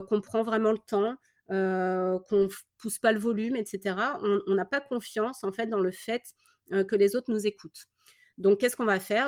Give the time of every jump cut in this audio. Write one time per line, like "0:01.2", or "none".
none